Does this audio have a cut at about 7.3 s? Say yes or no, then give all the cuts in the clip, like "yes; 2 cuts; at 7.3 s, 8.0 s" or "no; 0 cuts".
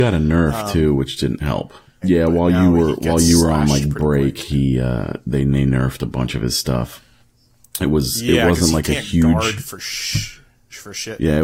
no; 1 cut; at 2.0 s